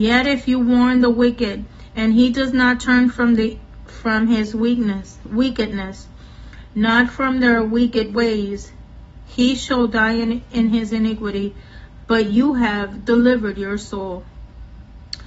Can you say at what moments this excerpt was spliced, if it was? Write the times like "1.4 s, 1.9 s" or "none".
none